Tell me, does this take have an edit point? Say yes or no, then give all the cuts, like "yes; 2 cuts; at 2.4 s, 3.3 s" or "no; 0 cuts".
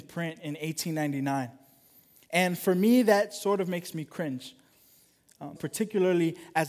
yes; 1 cut; at 5.5 s